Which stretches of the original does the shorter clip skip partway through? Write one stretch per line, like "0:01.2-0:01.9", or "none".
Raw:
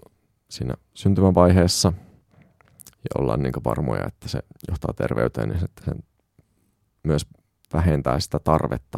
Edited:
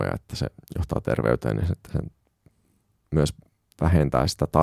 none